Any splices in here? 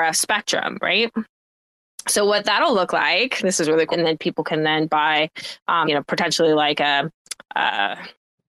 yes; 2 cuts; at 3.9 s, 5.8 s

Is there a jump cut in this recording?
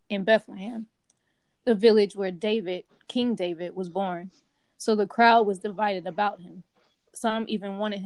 no; 0 cuts

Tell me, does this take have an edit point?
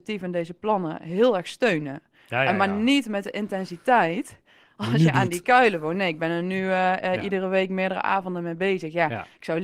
no; 0 cuts

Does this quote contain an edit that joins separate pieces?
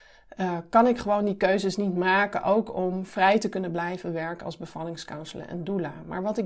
no; 0 cuts

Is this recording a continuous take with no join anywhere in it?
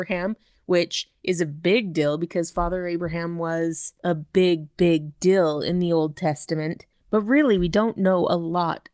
yes; 0 cuts

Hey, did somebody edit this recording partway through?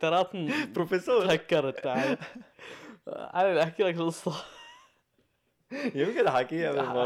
no; 0 cuts

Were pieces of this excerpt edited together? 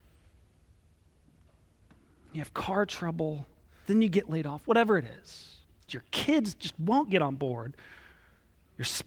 yes; 2 cuts; at 3.9 s, 5.9 s

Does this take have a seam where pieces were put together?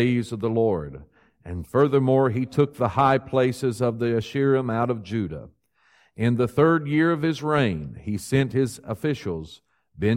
no; 0 cuts

